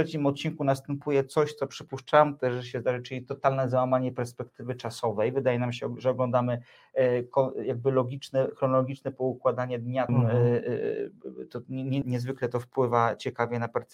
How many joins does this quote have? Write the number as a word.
two